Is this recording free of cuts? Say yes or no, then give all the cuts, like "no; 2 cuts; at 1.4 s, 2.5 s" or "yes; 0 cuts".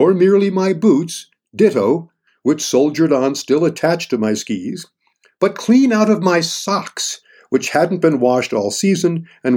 yes; 0 cuts